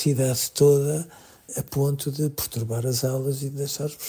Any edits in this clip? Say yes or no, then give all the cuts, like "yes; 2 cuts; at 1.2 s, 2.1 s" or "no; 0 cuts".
yes; 1 cut; at 1.5 s